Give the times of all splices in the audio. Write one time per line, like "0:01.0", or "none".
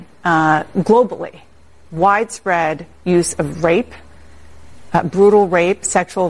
none